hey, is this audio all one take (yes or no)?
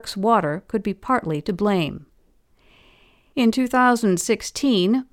yes